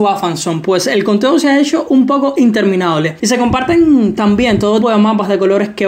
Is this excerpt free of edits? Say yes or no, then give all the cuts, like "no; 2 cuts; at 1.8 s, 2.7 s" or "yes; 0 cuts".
no; 1 cut; at 4.8 s